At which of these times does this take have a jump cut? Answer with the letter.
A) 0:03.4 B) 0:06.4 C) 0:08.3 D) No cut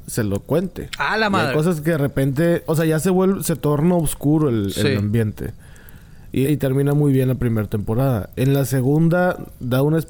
B